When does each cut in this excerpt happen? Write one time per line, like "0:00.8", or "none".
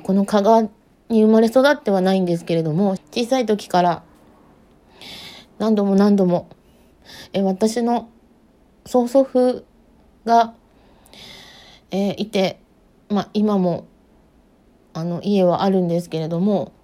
0:03.0

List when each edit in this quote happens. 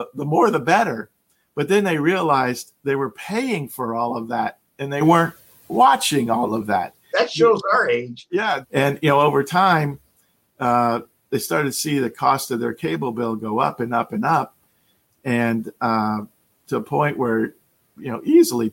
0:07.1
0:08.6

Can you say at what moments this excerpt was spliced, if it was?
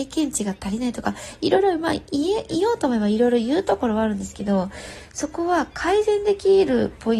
none

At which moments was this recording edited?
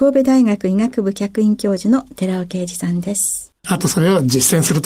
0:03.6

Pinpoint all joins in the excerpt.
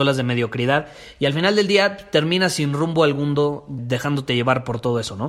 0:03.8

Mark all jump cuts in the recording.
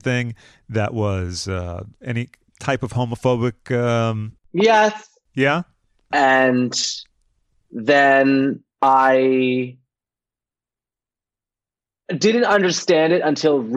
0:06.1
0:08.7

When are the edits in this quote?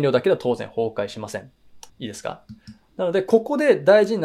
0:01.9

